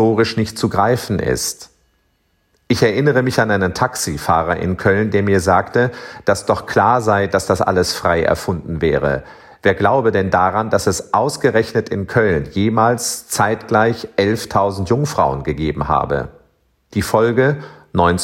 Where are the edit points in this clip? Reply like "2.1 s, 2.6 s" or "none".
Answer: 16.9 s